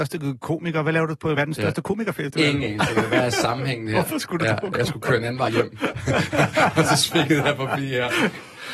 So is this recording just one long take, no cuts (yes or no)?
yes